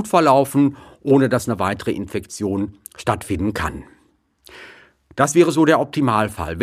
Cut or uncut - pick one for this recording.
uncut